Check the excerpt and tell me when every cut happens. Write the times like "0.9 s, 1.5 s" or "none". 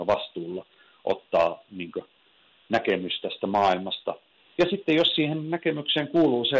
none